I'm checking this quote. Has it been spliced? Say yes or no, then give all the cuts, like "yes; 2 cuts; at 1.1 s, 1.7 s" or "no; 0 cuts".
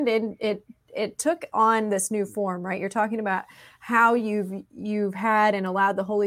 no; 0 cuts